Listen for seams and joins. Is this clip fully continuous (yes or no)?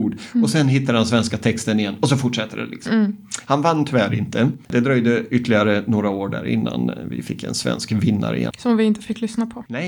no